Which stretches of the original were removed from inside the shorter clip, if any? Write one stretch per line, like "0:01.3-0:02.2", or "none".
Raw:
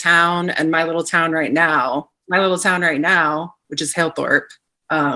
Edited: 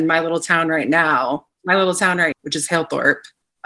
0:03.0-0:03.6